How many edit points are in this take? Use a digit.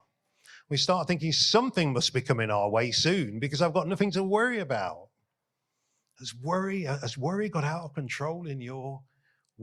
0